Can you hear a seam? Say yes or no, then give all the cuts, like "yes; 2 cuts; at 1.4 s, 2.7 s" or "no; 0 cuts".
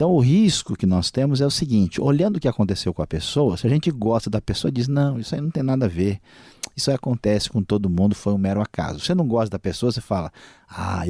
no; 0 cuts